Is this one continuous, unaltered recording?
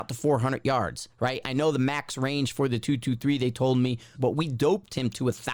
no; 1 cut; at 4.1 s

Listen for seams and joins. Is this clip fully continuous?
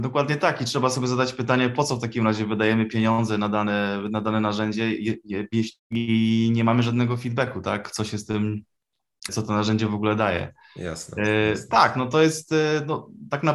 no; 2 cuts; at 5.8 s, 9.3 s

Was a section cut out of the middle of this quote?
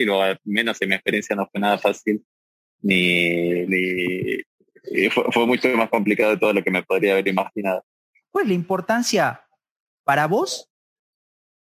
yes; 2 cuts; at 3.7 s, 8.2 s

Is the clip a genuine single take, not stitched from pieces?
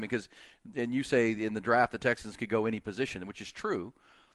yes; 0 cuts

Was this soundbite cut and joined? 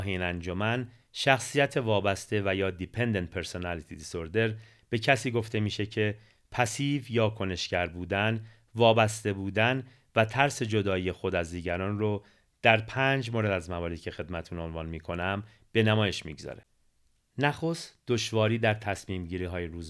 no; 0 cuts

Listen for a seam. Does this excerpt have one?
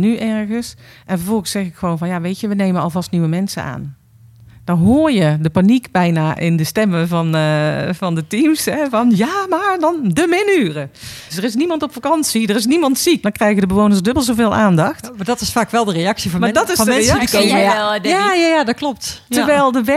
yes; 2 cuts; at 11.3 s, 13.2 s

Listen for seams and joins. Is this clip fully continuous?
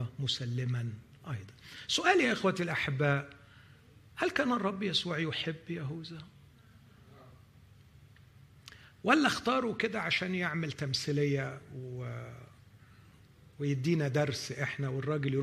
yes; 0 cuts

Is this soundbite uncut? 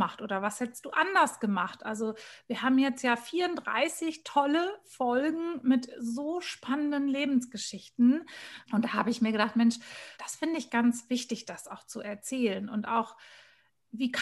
no; 2 cuts; at 8.7 s, 10.1 s

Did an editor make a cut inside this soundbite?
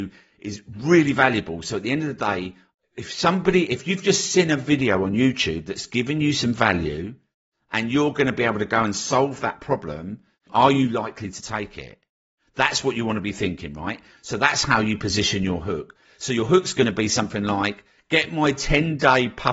yes; 1 cut; at 10.5 s

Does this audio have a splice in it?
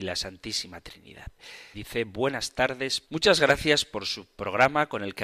yes; 2 cuts; at 1.7 s, 3.0 s

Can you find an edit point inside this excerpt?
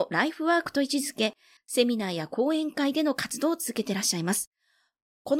yes; 1 cut; at 1.6 s

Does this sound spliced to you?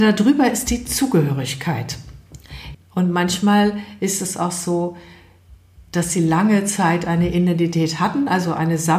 yes; 1 cut; at 2.7 s

